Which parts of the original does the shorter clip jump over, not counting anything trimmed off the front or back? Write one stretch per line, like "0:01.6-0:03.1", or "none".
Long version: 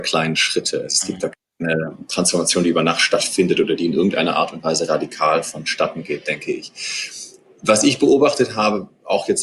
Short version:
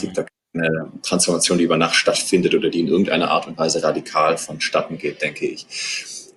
none